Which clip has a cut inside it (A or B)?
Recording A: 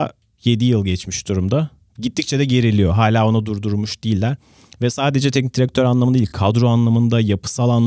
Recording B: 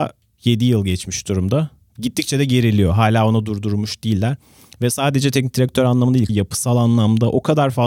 B